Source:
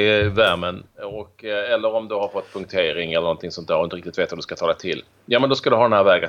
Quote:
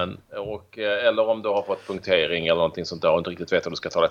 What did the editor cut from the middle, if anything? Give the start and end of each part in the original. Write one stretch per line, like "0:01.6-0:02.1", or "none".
none